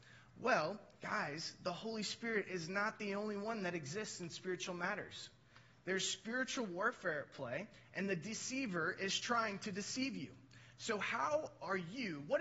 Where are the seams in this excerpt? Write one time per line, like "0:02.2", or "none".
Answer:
0:01.0